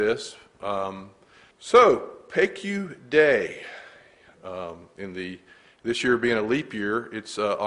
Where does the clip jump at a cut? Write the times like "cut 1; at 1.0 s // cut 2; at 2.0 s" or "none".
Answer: cut 1; at 1.5 s // cut 2; at 4.3 s